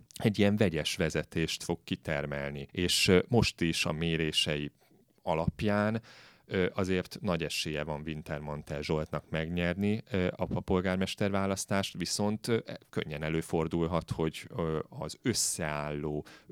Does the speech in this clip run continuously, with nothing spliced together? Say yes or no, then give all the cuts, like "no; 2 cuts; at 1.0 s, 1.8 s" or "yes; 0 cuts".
no; 1 cut; at 2.7 s